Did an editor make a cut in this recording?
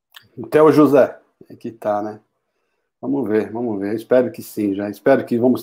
yes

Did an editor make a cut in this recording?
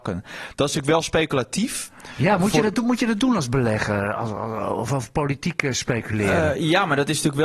no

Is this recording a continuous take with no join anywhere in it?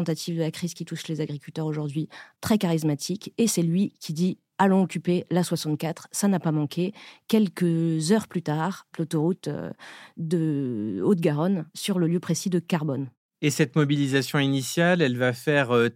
no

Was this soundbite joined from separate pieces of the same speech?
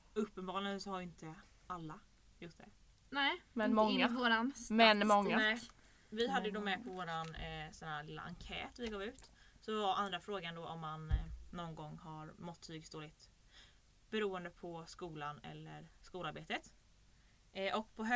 no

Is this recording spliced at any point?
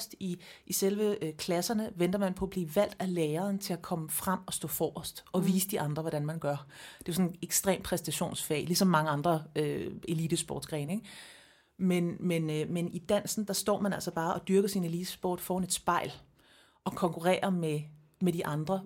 no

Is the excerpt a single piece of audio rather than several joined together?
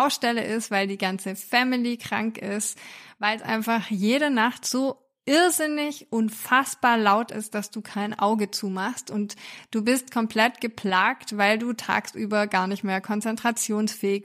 yes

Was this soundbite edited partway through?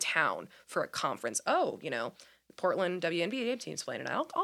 no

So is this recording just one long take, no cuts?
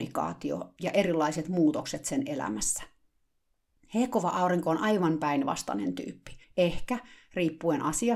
no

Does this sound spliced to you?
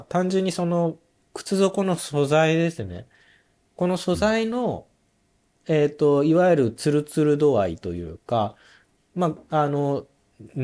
no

